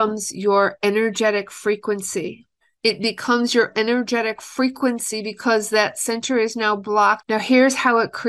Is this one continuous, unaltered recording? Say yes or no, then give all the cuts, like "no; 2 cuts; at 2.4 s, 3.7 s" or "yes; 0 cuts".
no; 2 cuts; at 2.8 s, 7.2 s